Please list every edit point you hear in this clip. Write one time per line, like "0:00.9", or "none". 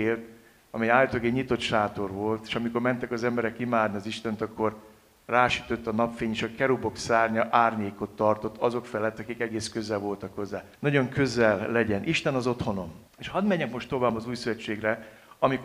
0:10.7
0:13.1